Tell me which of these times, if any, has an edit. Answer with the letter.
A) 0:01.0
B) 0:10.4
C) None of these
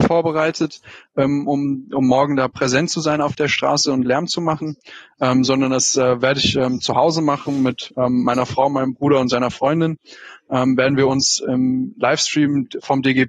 C